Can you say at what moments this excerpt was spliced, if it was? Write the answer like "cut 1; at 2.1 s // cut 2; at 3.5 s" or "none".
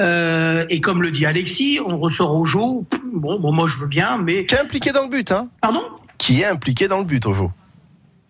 cut 1; at 5.6 s